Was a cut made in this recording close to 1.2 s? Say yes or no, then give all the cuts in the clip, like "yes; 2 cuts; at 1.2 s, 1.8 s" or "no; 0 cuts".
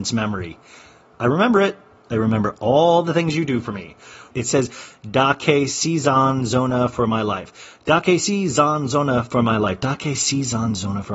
yes; 2 cuts; at 1.2 s, 4.3 s